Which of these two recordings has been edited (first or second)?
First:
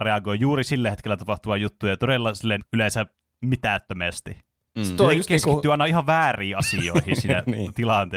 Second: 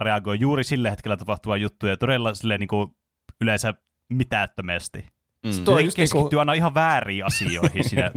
first